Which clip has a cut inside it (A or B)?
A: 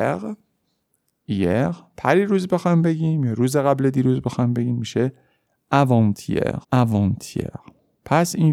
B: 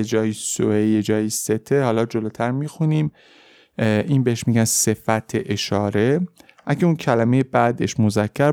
A